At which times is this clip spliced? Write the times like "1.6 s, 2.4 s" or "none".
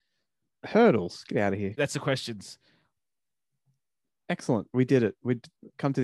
1.8 s